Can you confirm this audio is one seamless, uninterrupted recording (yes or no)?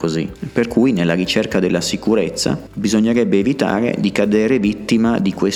yes